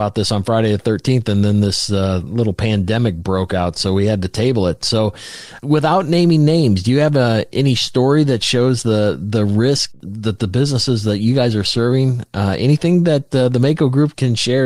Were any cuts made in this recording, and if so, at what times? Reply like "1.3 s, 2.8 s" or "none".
none